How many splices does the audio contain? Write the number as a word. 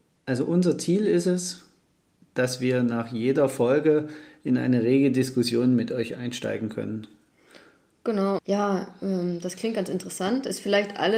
one